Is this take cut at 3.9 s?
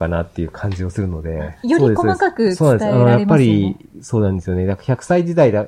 yes; 2 cuts; at 1.6 s, 3.9 s

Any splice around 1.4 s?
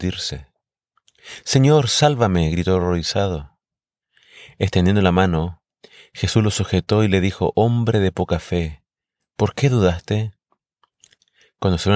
no; 0 cuts

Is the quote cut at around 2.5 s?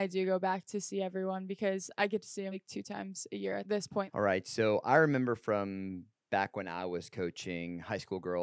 yes; 1 cut; at 2.5 s

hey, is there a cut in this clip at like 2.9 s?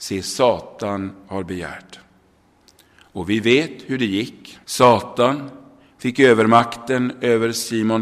no; 1 cut; at 4.6 s

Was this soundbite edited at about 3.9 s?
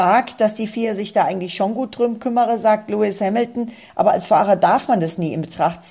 yes; 1 cut; at 3.9 s

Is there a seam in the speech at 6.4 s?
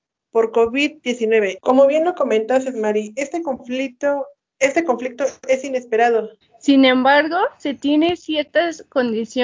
yes; 2 cuts; at 1.6 s, 6.4 s

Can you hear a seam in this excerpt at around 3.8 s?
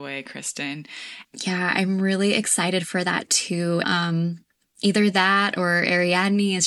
yes; 2 cuts; at 1.2 s, 3.8 s

